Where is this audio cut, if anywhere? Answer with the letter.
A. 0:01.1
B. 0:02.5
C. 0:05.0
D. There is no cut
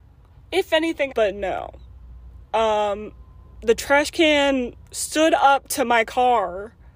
A